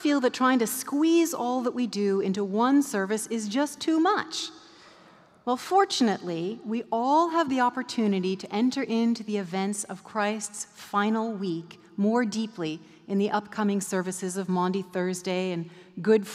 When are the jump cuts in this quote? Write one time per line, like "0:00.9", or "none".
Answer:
none